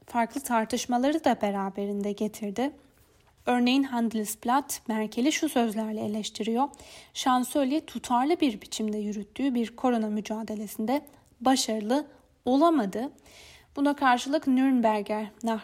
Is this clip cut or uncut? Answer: uncut